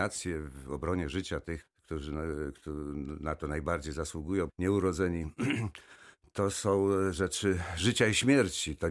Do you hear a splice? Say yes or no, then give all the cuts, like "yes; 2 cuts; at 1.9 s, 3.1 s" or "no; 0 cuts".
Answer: yes; 2 cuts; at 1.6 s, 4.5 s